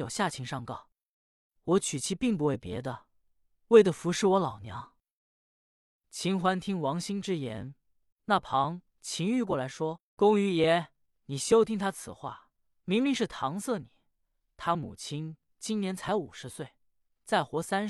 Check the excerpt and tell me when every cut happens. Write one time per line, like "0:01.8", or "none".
0:05.4
0:08.1

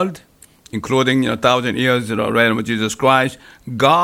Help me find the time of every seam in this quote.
none

